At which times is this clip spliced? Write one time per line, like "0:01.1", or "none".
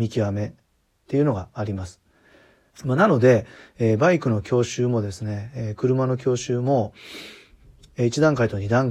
0:02.7